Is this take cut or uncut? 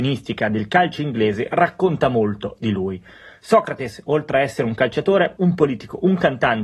cut